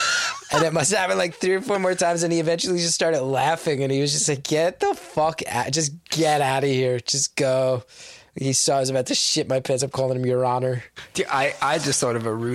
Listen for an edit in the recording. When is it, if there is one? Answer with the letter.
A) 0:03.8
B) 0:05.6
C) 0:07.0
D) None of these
D